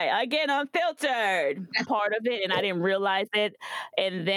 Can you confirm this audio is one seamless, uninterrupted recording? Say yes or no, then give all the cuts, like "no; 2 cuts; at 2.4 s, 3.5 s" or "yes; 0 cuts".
no; 1 cut; at 1.9 s